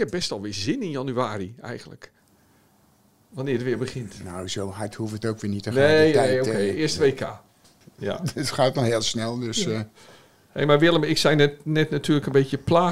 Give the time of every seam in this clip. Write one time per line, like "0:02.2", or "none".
none